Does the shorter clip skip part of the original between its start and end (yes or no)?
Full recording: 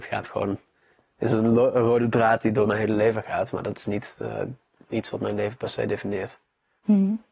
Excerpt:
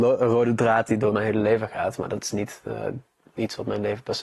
no